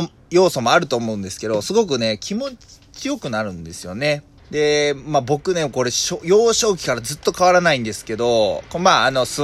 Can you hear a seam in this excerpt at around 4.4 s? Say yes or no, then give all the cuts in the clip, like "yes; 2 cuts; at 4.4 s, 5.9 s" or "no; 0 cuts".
yes; 1 cut; at 4.4 s